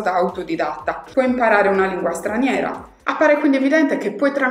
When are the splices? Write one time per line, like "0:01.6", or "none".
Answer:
0:01.1
0:03.0